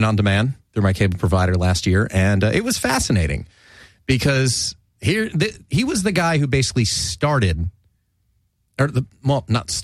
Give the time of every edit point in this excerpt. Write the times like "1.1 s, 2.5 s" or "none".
none